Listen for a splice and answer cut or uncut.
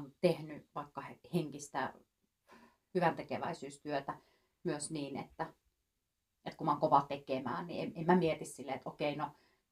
uncut